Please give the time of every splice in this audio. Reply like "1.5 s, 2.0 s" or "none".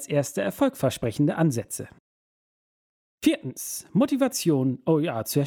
none